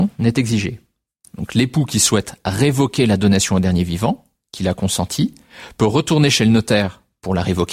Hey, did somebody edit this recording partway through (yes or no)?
no